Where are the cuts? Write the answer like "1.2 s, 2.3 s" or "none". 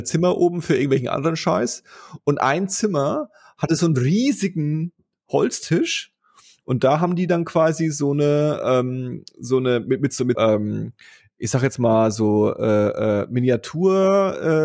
10.4 s

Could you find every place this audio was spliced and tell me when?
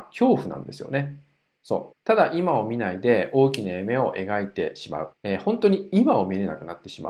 1.9 s, 5.1 s

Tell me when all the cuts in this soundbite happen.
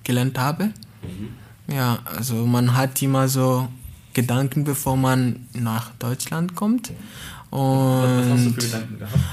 none

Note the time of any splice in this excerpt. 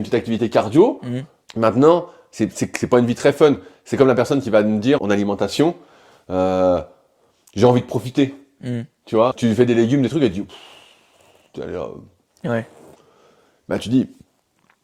1.5 s, 5.0 s, 9.3 s

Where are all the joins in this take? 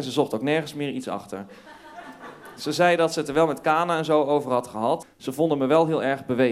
5.0 s

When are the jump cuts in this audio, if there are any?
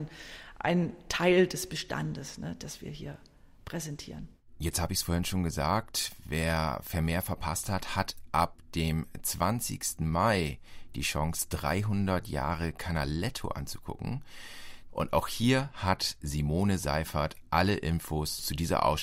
14.9 s

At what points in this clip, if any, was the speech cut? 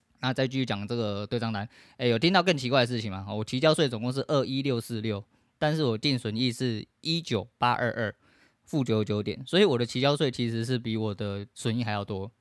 none

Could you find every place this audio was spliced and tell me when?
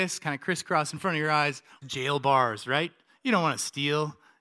1.8 s

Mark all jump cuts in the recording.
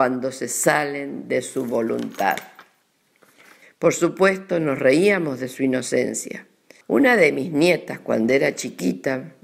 3.6 s, 6.8 s

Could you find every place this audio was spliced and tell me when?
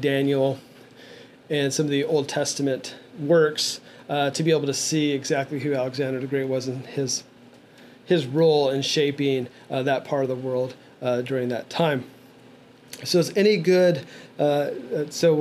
none

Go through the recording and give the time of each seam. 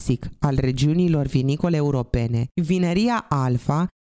2.5 s

